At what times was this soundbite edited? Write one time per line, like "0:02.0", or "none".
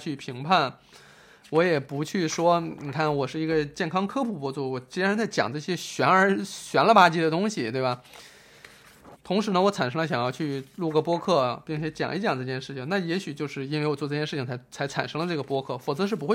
0:09.2